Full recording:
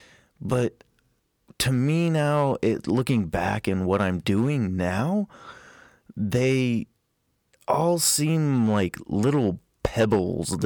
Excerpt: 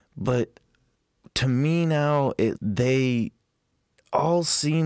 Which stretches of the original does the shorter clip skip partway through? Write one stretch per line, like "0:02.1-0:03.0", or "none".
0:02.8-0:06.1